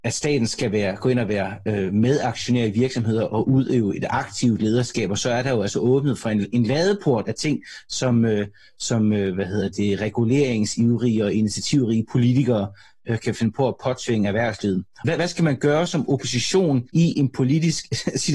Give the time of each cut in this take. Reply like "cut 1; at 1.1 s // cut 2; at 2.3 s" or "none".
cut 1; at 15.0 s // cut 2; at 16.9 s

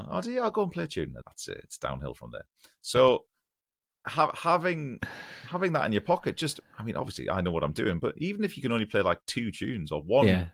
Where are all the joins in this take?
cut 1; at 1.2 s

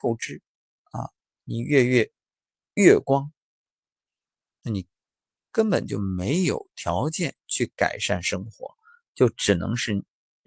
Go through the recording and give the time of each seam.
none

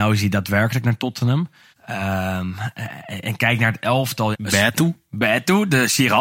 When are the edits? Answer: cut 1; at 1.7 s // cut 2; at 4.3 s

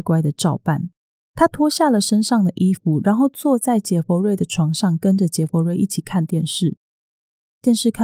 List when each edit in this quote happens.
none

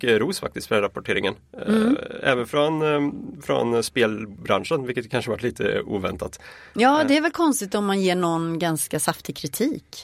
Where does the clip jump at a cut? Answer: none

